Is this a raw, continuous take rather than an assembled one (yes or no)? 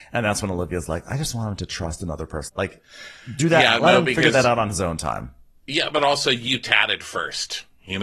no